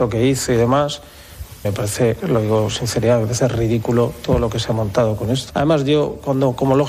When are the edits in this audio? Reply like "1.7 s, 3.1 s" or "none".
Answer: 1.6 s, 5.5 s